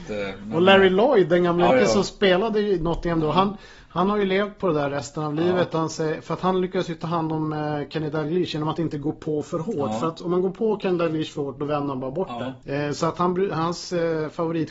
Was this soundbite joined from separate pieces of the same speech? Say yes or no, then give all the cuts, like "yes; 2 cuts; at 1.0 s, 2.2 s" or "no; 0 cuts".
yes; 1 cut; at 1.7 s